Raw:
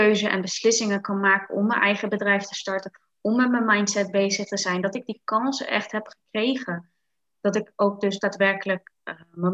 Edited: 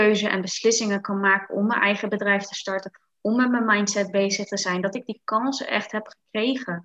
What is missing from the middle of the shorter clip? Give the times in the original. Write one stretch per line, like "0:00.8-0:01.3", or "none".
none

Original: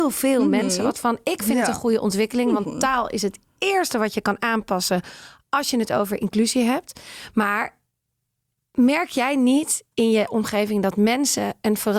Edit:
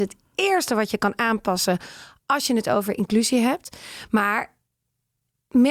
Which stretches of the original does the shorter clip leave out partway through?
none

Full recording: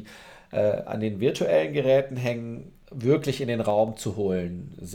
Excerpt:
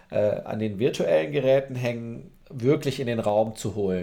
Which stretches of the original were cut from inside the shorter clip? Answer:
none

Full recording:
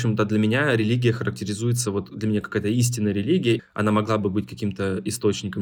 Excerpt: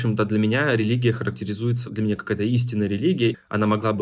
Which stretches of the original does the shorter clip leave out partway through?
0:01.8-0:02.1

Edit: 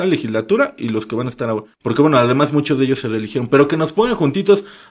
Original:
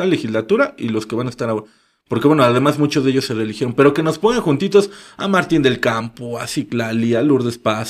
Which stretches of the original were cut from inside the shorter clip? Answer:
0:01.7-0:02.0

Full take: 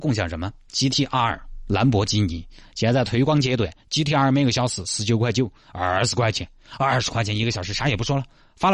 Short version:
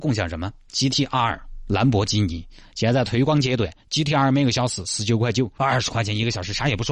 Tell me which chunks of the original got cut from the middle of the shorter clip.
0:05.6-0:06.8

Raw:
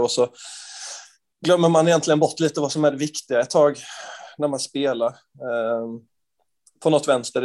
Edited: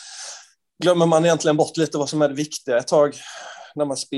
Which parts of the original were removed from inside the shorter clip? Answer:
none

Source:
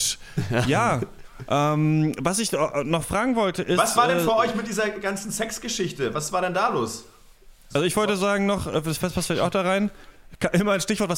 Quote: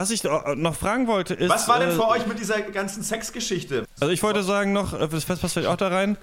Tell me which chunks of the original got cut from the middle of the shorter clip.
0:06.1-0:07.6

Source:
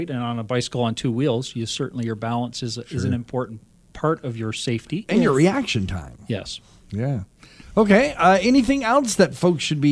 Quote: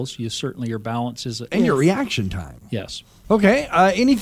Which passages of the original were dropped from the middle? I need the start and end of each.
0:02.8-0:05.1
0:06.8-0:07.7

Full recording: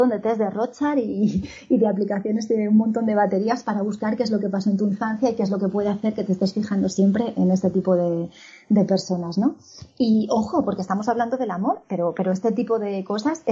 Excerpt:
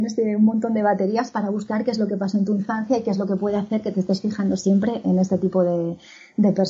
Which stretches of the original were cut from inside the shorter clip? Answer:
none

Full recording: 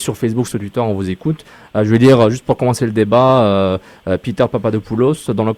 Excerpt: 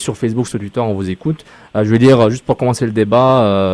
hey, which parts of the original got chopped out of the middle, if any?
none

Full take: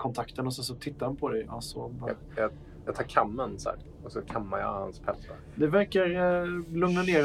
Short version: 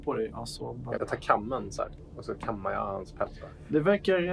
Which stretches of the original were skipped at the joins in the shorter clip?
0:02.1-0:02.8

